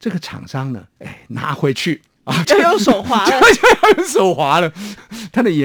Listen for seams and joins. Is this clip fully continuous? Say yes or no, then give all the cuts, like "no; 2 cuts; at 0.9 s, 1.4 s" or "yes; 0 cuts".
no; 2 cuts; at 1.0 s, 2.4 s